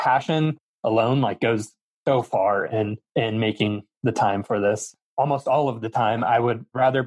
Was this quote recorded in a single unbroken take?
yes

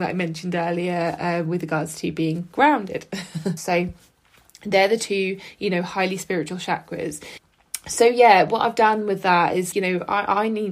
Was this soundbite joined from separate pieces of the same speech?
yes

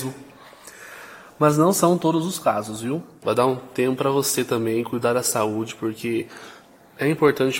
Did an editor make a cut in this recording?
yes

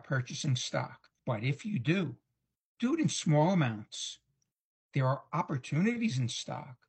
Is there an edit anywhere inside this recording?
yes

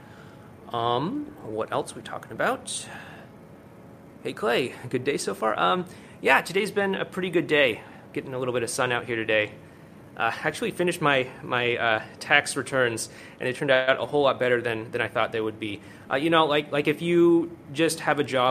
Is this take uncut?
yes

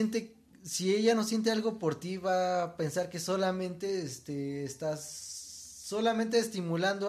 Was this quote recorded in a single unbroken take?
yes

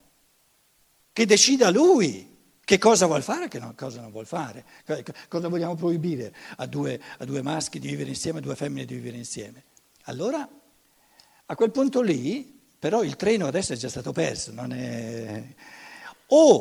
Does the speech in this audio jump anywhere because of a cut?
no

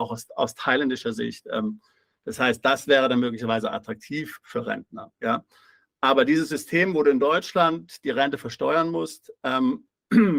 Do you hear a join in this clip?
no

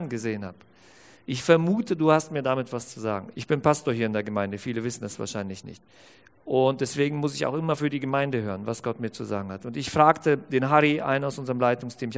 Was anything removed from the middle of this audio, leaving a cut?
yes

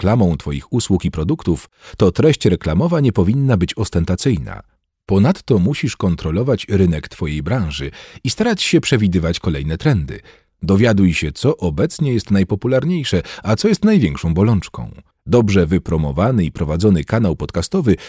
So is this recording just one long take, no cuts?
no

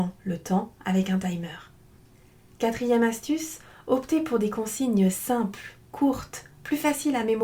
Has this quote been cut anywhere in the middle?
no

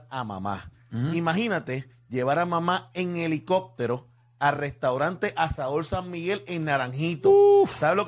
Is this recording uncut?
yes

